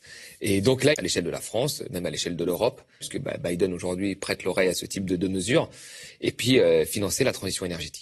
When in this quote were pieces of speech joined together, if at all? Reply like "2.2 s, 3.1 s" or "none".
0.9 s, 3.0 s